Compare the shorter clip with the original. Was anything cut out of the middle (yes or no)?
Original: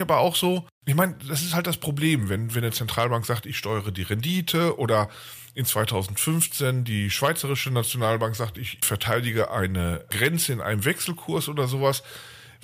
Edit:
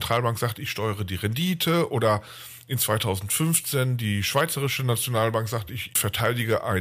no